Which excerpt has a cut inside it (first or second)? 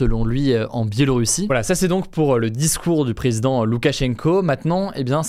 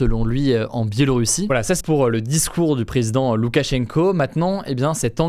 second